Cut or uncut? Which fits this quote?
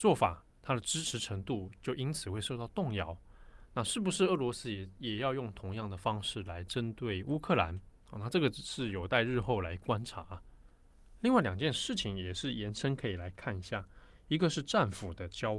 uncut